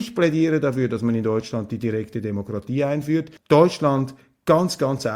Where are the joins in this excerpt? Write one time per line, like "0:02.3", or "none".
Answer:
0:03.4